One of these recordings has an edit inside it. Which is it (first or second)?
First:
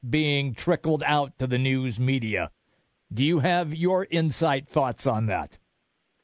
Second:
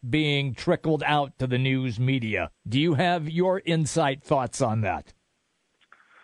second